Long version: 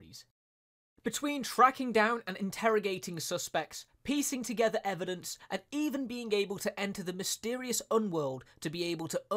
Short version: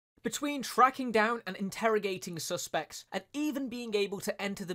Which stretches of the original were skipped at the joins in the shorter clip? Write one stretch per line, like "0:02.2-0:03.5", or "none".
0:03.9-0:05.5